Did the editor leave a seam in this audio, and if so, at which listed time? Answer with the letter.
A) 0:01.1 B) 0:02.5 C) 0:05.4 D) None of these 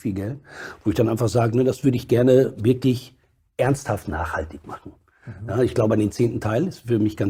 D